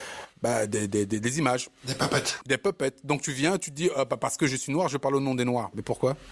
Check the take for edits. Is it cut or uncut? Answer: uncut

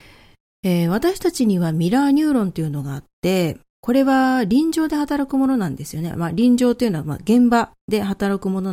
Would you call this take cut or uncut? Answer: uncut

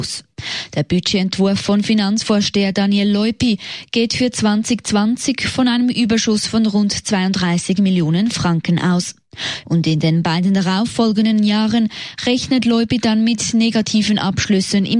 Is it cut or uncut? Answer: cut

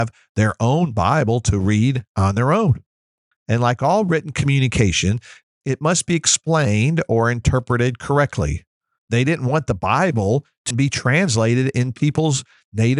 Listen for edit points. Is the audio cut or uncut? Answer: cut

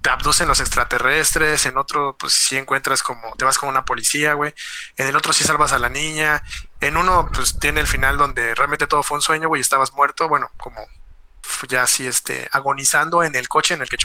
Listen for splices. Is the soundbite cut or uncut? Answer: uncut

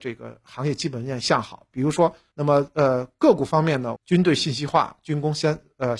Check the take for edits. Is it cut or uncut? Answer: cut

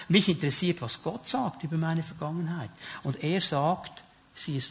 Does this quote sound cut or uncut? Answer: uncut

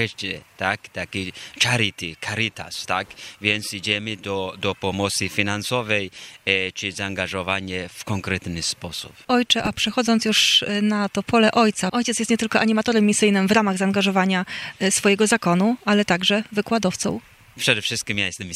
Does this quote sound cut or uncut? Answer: cut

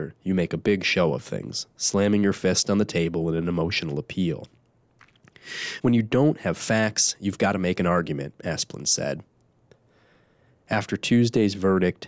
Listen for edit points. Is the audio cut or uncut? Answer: uncut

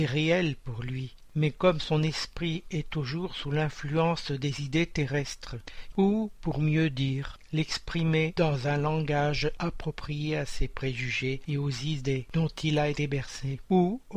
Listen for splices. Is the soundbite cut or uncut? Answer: cut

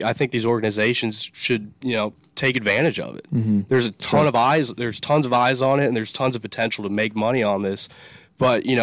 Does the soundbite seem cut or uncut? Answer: uncut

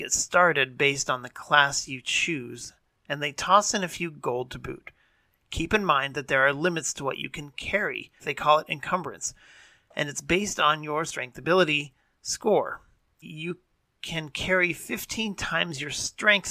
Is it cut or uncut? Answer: cut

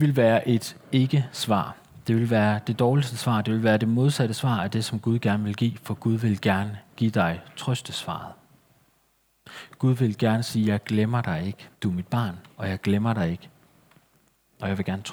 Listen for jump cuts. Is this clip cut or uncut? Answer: cut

